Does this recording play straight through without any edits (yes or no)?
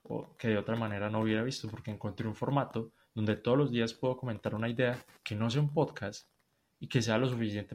yes